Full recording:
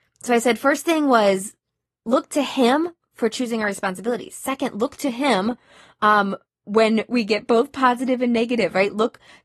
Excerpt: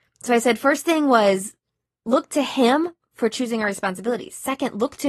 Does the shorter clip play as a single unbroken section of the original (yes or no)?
yes